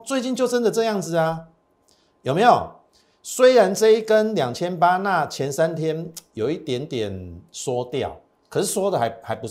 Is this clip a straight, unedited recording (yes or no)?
yes